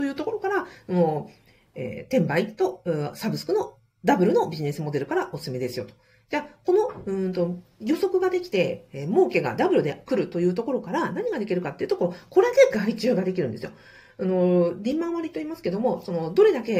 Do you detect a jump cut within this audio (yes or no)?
no